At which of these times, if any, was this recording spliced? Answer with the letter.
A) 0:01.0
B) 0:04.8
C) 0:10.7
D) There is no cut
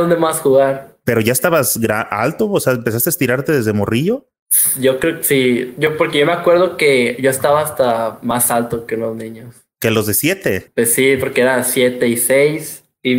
D